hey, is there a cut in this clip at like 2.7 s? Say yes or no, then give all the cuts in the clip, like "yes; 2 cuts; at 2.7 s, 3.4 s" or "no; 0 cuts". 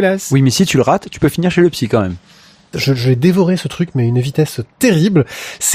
yes; 1 cut; at 2.7 s